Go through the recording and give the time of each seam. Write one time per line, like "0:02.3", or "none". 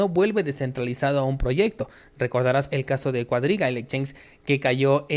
0:02.7